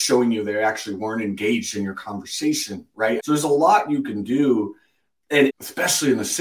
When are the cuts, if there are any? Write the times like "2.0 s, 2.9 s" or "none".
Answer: 3.2 s, 5.5 s